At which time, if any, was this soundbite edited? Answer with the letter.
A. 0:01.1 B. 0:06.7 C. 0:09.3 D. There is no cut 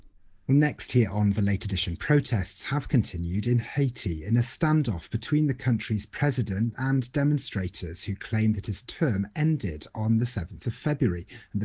B